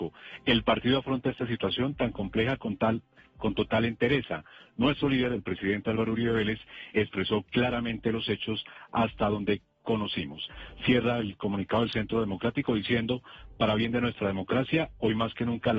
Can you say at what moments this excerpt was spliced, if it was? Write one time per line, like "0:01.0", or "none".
none